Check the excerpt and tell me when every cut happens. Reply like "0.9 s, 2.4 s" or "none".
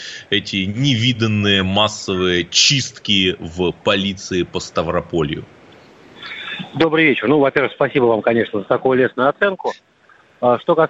none